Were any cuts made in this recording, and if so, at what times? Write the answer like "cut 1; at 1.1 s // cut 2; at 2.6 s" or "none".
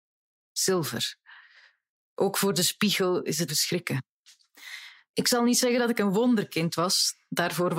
cut 1; at 3.5 s